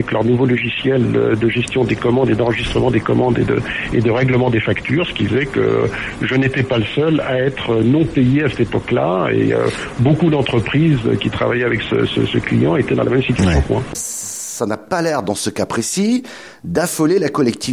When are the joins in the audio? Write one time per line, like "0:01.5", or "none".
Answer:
0:13.9